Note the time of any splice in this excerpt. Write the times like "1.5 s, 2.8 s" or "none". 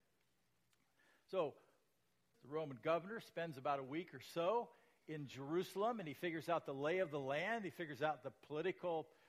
2.3 s

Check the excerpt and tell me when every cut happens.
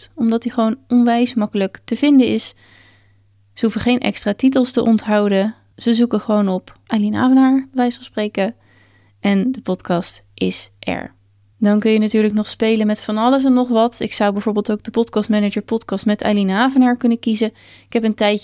none

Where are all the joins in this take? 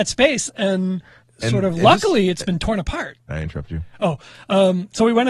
1.2 s, 3.3 s

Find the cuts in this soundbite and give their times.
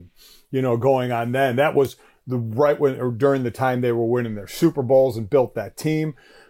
none

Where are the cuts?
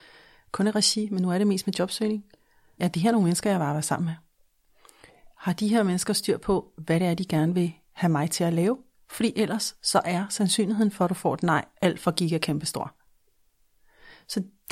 2.8 s

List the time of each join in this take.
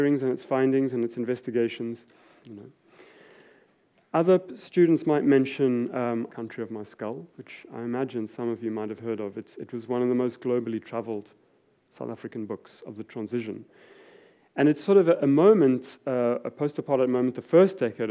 2.4 s, 6.3 s

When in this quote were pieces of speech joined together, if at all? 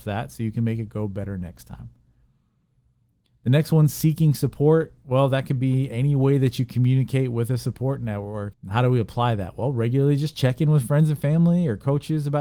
8.5 s

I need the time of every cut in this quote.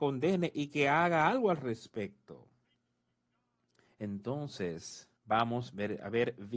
3.9 s, 5.2 s

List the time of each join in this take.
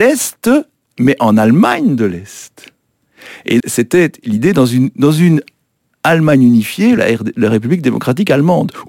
3.6 s, 7.0 s

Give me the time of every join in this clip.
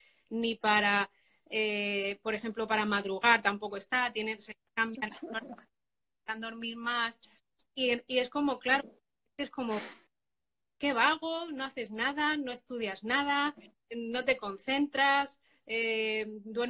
none

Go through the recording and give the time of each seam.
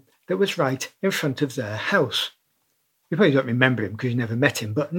3.0 s

